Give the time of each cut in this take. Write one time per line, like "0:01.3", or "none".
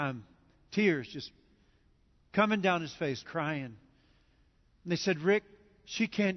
0:03.2